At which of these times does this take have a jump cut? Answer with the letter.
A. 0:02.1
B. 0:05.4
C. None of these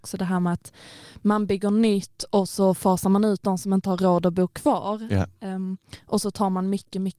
C